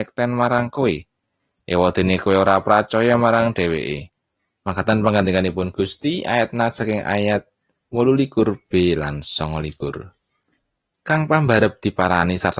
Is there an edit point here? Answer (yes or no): yes